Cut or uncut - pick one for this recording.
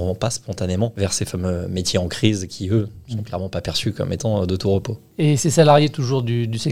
uncut